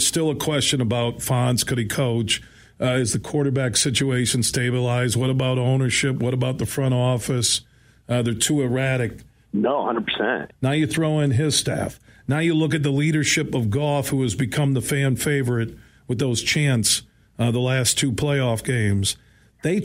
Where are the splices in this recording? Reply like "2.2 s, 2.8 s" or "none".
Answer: 9.4 s, 10.5 s